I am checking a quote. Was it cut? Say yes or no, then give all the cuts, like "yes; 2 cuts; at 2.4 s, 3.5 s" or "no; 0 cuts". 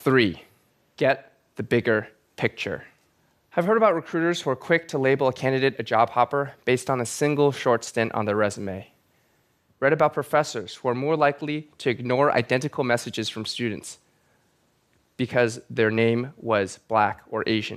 no; 0 cuts